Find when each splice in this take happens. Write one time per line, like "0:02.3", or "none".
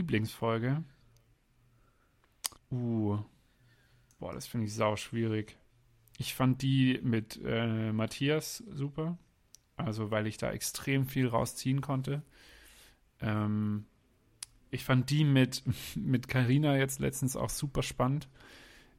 0:02.6